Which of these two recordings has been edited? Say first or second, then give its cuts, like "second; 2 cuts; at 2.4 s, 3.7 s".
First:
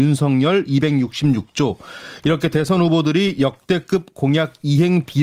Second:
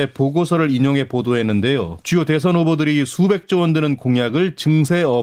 second; 1 cut; at 2.0 s